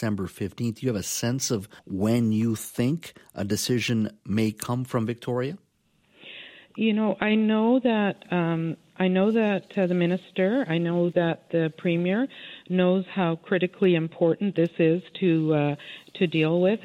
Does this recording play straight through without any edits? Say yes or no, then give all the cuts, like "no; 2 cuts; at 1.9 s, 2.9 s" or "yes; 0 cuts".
no; 1 cut; at 1.8 s